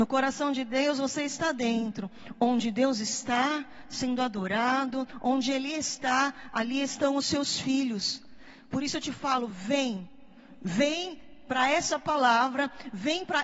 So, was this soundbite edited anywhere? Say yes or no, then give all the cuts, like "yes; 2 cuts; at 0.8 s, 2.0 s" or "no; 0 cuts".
no; 0 cuts